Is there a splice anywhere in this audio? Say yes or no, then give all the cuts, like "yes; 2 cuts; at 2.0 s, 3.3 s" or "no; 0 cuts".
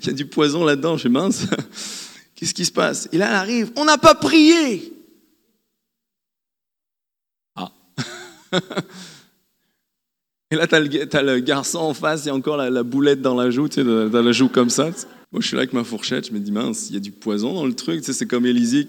yes; 1 cut; at 15.2 s